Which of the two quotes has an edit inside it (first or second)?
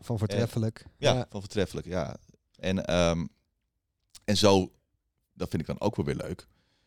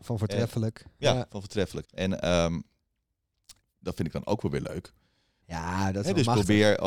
second